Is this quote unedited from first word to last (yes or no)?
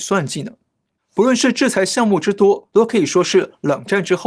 no